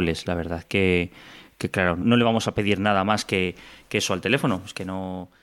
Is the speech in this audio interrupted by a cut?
yes; 1 cut; at 2.0 s

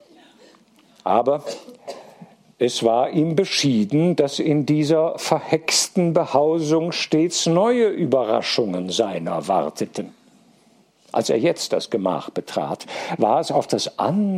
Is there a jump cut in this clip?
no; 0 cuts

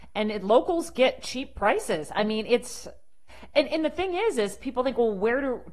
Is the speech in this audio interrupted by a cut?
no; 0 cuts

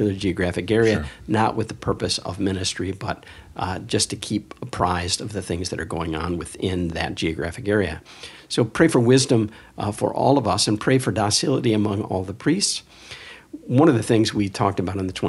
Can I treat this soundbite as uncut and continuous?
yes; 0 cuts

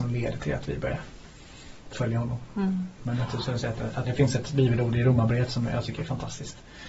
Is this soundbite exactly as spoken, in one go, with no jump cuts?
no; 2 cuts; at 3.0 s, 4.0 s

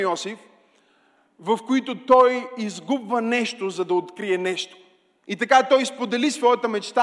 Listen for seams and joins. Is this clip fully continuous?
no; 1 cut; at 5.2 s

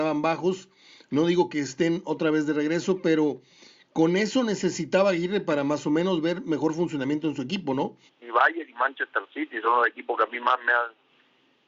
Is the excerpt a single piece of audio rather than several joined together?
no; 1 cut; at 8.1 s

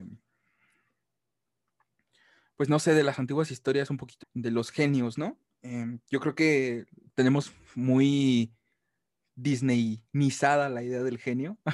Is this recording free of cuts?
no; 1 cut; at 4.2 s

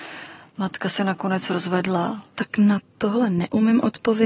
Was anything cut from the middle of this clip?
yes; 1 cut; at 2.3 s

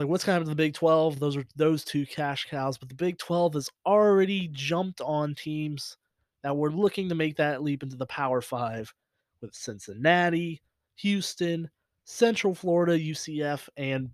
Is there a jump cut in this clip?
no; 0 cuts

